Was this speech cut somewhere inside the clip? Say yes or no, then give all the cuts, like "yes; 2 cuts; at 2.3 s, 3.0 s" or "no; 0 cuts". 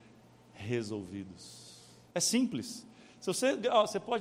yes; 1 cut; at 2.1 s